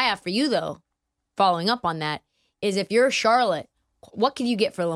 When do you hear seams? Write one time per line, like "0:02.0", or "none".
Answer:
none